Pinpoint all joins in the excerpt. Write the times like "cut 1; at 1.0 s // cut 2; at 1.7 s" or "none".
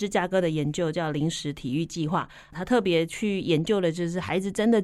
none